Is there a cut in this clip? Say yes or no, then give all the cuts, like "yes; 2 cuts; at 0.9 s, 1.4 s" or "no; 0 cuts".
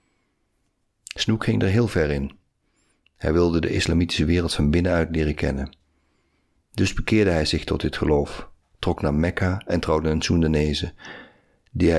no; 0 cuts